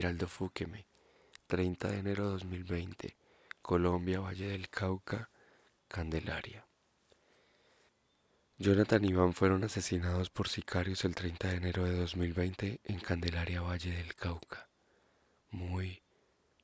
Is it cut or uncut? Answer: uncut